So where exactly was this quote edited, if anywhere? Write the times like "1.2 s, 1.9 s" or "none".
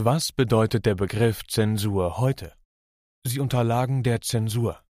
3.1 s